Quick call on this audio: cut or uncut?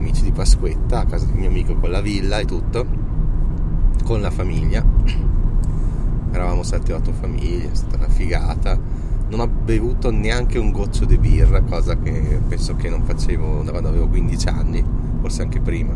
cut